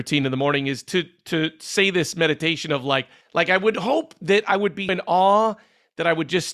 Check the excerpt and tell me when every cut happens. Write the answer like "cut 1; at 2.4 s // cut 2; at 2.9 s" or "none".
cut 1; at 3.2 s // cut 2; at 4.9 s